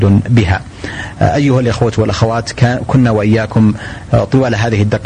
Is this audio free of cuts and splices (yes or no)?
yes